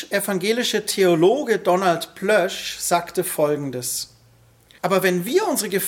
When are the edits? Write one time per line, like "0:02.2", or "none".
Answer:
0:04.8